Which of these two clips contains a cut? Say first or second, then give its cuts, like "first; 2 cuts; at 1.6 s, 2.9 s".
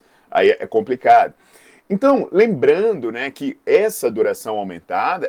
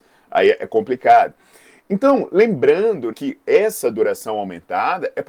second; 1 cut; at 3.1 s